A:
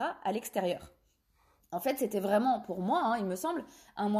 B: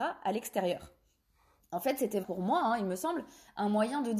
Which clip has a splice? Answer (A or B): B